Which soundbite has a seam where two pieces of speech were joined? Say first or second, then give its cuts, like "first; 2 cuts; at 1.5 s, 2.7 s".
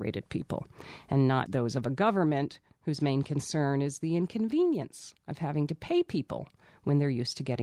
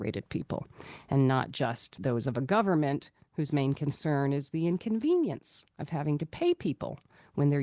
first; 1 cut; at 1.5 s